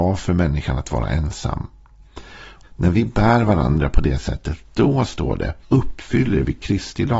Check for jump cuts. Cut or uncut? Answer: cut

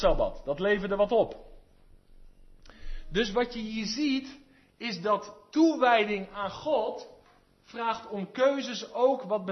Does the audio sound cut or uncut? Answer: uncut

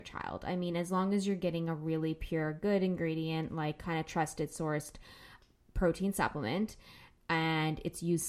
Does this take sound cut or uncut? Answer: uncut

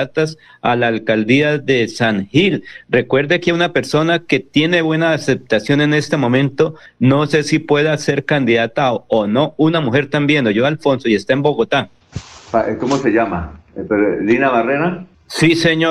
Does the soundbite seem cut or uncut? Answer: uncut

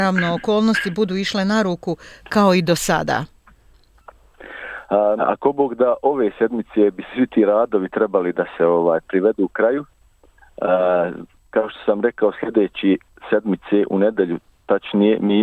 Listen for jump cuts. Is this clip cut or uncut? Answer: cut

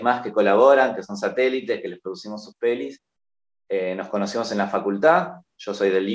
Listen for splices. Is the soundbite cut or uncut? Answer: uncut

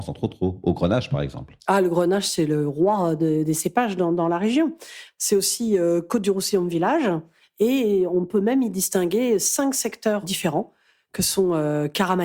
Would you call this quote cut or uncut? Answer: cut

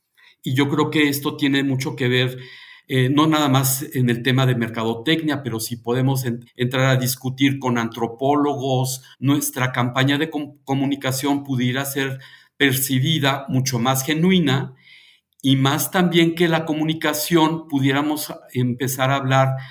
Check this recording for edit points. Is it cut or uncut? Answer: cut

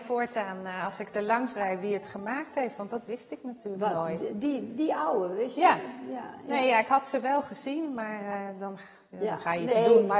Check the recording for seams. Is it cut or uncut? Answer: uncut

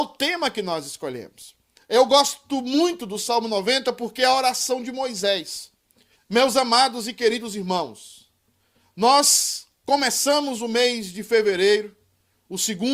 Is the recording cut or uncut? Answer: cut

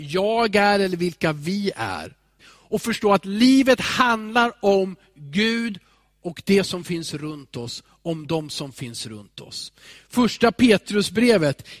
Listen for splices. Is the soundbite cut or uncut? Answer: cut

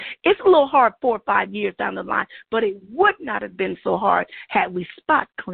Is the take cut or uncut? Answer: uncut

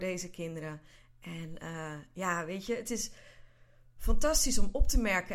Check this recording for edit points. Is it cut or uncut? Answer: uncut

